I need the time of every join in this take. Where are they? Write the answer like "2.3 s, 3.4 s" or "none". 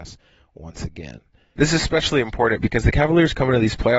1.6 s